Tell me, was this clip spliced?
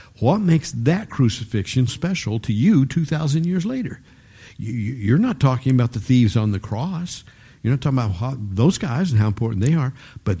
yes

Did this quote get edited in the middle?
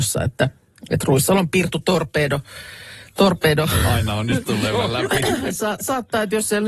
no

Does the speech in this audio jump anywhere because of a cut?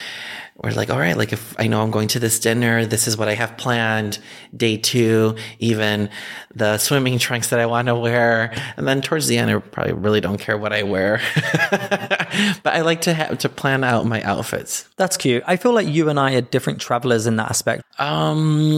yes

